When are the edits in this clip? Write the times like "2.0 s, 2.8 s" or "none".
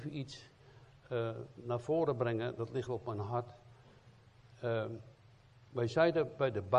2.9 s

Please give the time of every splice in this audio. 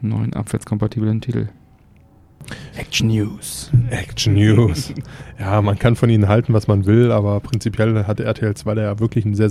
2.7 s

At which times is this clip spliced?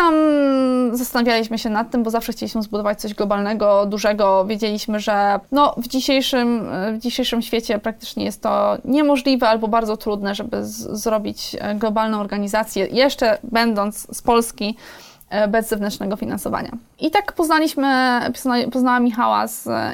5.5 s

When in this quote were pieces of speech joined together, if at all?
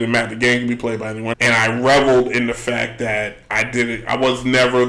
1.3 s

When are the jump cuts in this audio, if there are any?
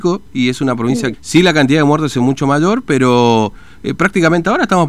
1.1 s

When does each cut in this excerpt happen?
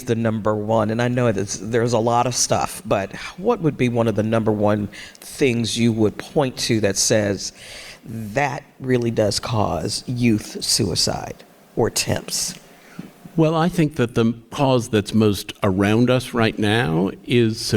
none

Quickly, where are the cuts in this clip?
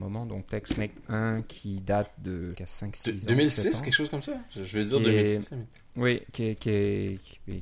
2.5 s

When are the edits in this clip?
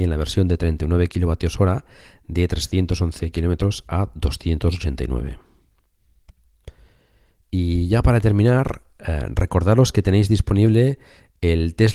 none

